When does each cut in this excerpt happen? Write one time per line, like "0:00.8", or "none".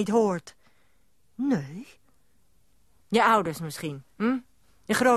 0:03.0